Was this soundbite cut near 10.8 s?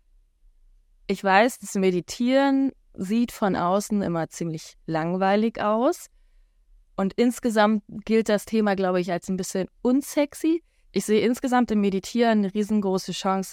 yes; 1 cut; at 10.8 s

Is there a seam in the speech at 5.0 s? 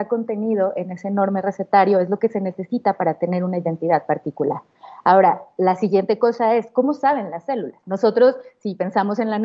no; 1 cut; at 7.8 s

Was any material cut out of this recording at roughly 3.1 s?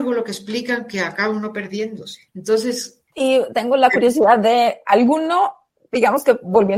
yes; 1 cut; at 3.1 s

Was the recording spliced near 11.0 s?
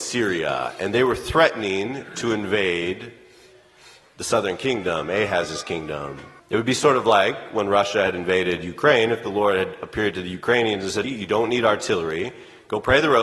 yes; 2 cuts; at 6.4 s, 11.0 s

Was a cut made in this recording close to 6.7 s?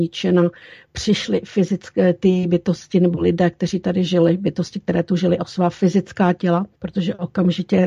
yes; 1 cut; at 6.7 s

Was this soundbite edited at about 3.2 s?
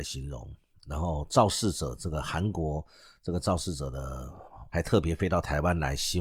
no; 1 cut; at 4.7 s

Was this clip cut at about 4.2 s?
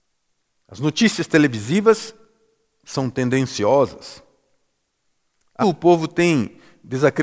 no; 1 cut; at 5.6 s

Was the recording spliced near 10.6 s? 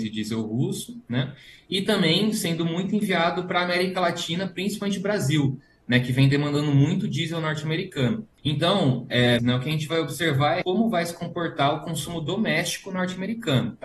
yes; 3 cuts; at 8.4 s, 9.4 s, 10.6 s

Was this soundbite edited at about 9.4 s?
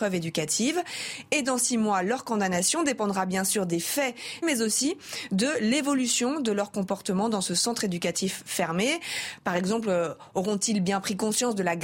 no; 1 cut; at 4.4 s

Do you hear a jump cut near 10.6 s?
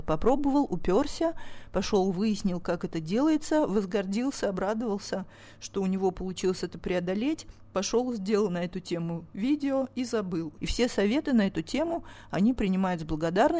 yes; 1 cut; at 10.6 s

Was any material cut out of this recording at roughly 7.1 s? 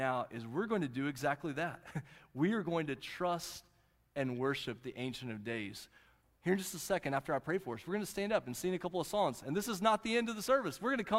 no; 0 cuts

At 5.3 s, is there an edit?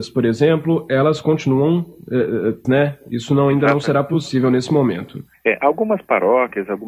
yes; 2 cuts; at 2.6 s, 5.3 s

